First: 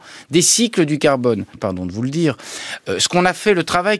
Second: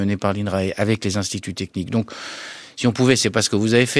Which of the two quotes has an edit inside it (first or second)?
first